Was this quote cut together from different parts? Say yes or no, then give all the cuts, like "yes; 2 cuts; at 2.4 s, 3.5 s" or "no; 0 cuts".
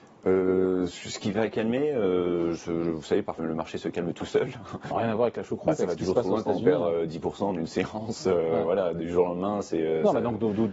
yes; 2 cuts; at 3.4 s, 4.9 s